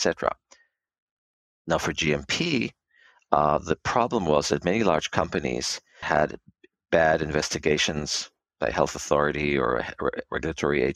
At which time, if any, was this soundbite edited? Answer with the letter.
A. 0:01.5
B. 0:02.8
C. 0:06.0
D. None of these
C